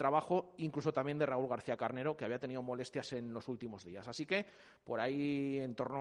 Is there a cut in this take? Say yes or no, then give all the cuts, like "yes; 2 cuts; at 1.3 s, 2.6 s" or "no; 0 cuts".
no; 0 cuts